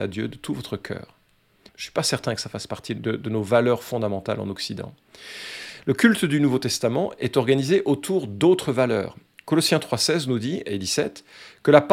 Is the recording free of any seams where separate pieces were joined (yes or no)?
no